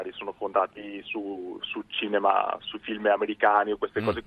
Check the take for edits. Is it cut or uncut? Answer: uncut